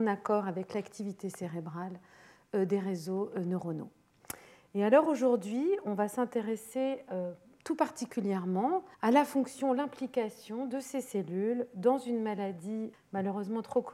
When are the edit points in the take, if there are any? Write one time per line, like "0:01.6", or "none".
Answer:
0:08.9
0:12.9